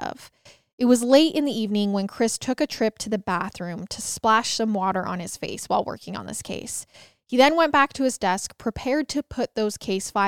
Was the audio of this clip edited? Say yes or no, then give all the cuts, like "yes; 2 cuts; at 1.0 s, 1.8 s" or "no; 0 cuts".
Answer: no; 0 cuts